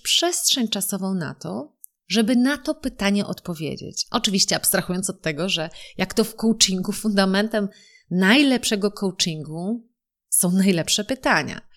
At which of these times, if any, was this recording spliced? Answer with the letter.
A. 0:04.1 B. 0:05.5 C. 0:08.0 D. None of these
A